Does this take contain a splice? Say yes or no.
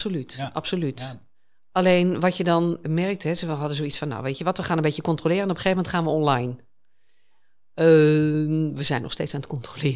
yes